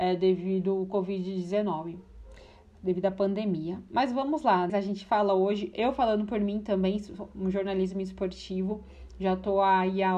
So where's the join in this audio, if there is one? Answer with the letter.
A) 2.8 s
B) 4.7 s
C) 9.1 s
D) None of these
B